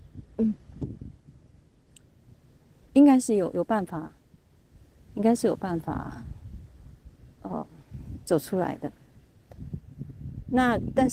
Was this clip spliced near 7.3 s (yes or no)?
no